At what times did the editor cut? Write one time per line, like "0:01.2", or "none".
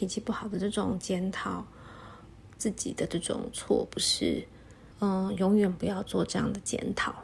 0:04.9